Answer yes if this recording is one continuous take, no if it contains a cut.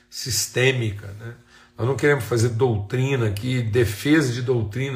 yes